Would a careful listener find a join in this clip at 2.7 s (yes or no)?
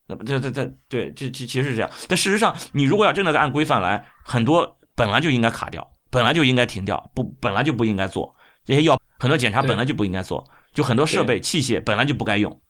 no